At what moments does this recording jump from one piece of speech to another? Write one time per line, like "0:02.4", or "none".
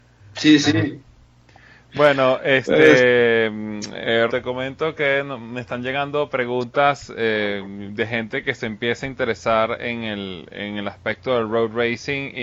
0:04.3